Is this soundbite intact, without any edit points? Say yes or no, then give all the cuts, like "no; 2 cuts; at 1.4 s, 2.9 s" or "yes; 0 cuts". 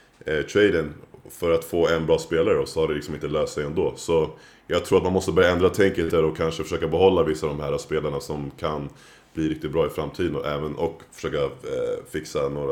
yes; 0 cuts